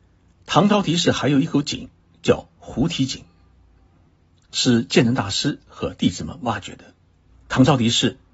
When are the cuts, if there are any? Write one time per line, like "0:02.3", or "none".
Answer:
0:07.3